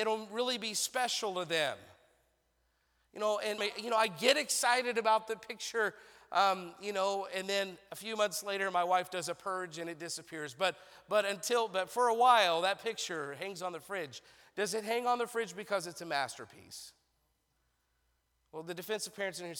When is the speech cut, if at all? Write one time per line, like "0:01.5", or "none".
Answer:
0:03.6